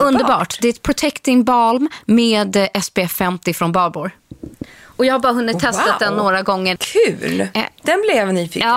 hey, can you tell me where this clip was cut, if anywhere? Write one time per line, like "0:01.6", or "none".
0:06.8